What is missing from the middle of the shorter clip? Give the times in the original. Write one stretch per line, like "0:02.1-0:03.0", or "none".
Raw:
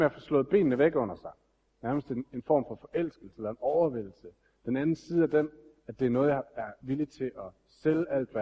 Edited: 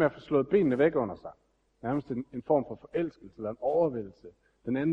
none